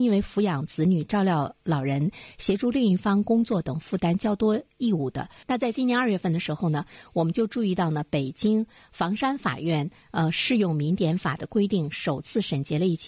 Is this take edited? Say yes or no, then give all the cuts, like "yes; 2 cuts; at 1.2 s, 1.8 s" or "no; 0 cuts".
yes; 1 cut; at 5.4 s